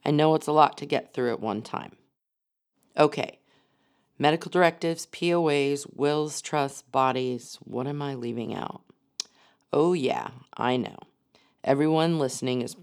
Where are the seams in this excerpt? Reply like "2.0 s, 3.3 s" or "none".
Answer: none